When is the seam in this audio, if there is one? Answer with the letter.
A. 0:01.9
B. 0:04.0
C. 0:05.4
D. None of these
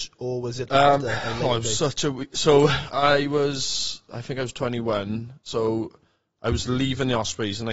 D